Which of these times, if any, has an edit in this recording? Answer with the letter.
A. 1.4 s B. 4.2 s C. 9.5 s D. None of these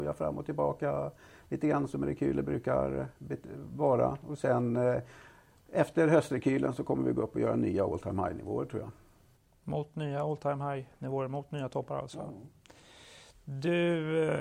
D